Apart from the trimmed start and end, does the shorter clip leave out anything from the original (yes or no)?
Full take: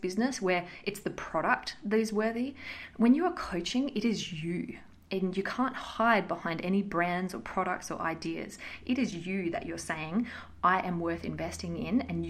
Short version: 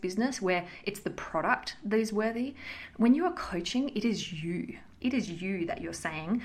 yes